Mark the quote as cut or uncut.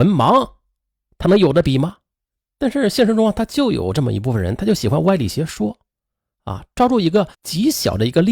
cut